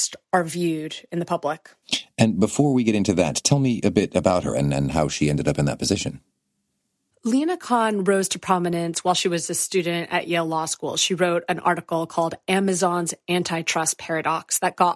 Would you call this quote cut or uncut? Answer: uncut